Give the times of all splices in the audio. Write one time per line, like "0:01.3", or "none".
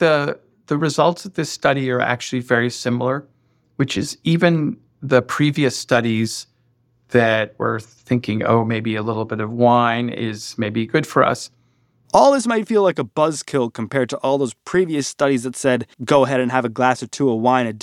0:12.1
0:15.9

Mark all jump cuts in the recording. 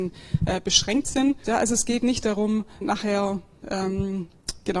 0:01.5
0:02.8

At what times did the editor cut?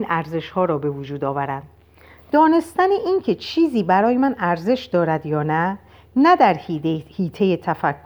none

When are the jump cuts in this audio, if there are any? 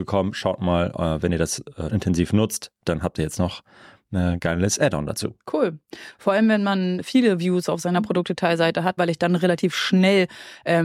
0:01.9
0:09.0

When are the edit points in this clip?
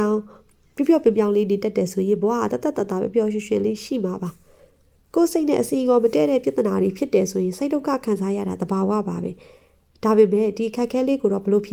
none

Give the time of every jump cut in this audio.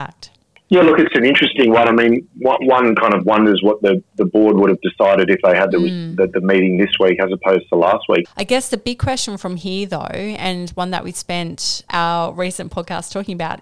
0:08.2
0:11.9

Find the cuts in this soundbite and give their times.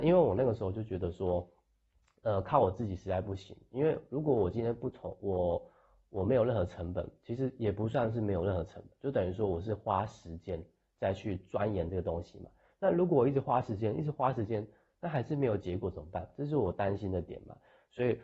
none

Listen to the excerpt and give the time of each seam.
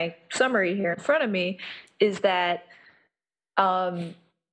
none

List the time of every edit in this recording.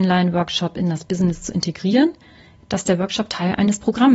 0:02.6

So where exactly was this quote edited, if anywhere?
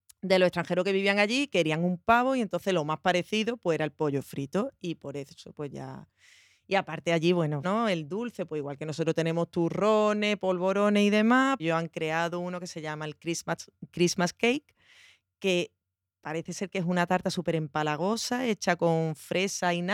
0:07.6
0:11.6

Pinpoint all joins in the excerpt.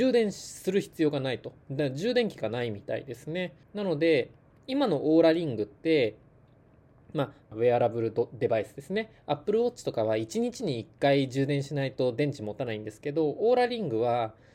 0:03.6
0:07.5

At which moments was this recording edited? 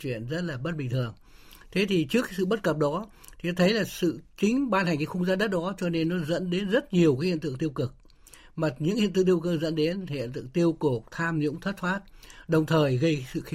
none

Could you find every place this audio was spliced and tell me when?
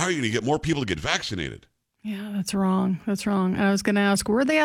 none

